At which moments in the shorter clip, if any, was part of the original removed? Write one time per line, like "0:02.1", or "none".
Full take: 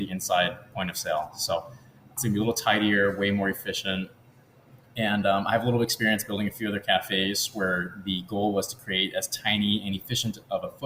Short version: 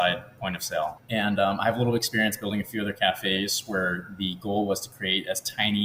0:01.0